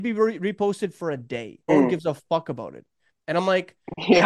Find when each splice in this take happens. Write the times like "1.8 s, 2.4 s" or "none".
1.7 s